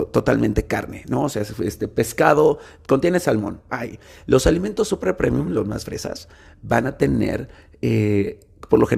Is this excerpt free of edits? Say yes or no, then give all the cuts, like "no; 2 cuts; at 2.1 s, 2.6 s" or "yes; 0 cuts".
no; 1 cut; at 3.7 s